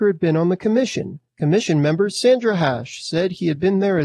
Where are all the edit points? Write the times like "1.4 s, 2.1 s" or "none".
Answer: 1.3 s